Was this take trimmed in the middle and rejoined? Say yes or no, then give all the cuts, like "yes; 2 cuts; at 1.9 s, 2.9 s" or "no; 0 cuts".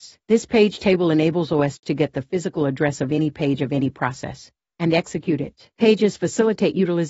yes; 1 cut; at 4.7 s